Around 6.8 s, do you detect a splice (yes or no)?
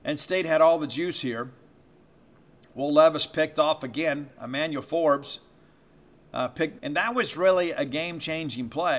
yes